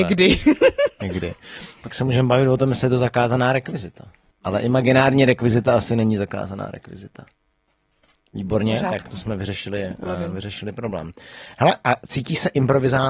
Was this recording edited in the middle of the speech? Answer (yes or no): yes